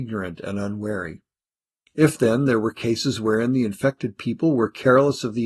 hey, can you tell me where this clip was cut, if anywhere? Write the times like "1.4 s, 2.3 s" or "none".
1.9 s